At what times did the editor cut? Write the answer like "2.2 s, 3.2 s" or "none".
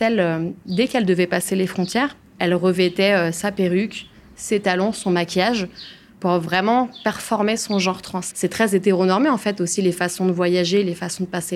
8.3 s